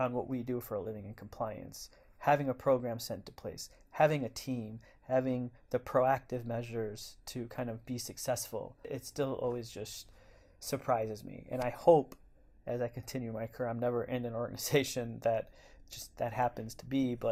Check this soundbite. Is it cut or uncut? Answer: uncut